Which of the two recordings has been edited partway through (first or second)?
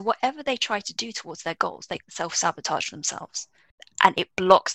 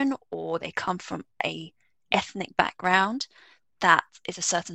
first